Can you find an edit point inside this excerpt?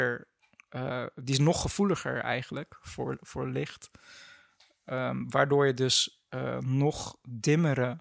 no; 0 cuts

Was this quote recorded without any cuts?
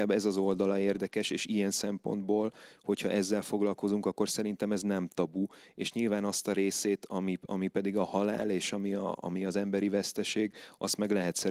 yes; 0 cuts

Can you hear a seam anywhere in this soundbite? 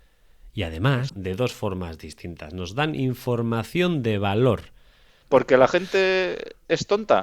yes; 2 cuts; at 1.1 s, 5.2 s

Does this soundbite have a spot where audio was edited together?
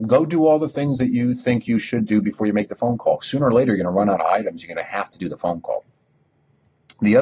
no; 0 cuts

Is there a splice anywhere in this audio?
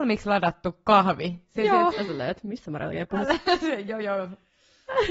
yes; 1 cut; at 1.9 s

